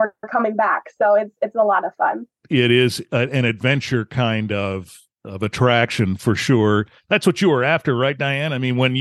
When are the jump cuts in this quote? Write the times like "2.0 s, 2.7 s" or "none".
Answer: none